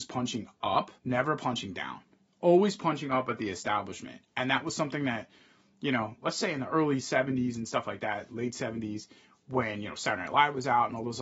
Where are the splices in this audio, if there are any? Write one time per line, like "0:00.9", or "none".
0:01.0